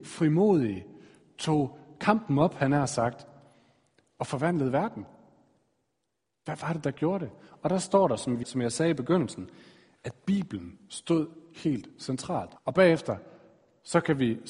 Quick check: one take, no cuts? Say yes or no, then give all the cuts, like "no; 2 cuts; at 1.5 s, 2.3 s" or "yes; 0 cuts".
no; 3 cuts; at 8.4 s, 10.0 s, 12.6 s